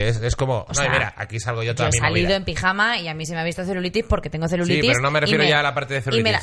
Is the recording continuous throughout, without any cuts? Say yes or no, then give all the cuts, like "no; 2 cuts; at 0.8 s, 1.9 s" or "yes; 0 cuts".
yes; 0 cuts